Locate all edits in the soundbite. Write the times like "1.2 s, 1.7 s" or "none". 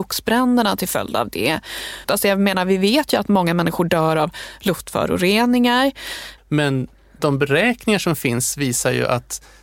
2.0 s, 6.4 s